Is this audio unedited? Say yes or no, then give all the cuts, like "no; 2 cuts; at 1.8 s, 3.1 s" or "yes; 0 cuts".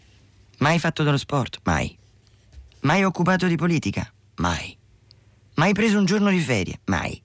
yes; 0 cuts